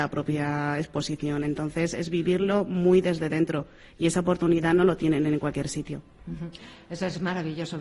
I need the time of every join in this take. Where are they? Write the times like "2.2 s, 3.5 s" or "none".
none

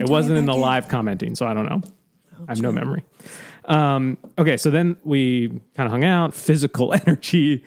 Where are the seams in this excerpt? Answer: 5.0 s, 6.3 s

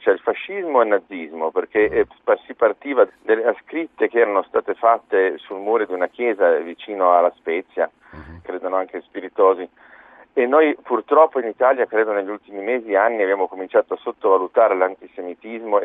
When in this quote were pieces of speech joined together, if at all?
3.1 s, 8.4 s

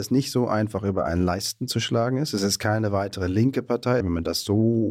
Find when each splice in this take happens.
4.0 s

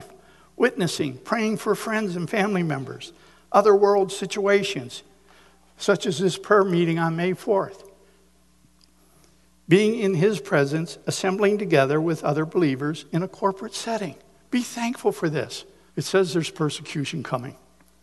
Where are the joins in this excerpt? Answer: 15.9 s

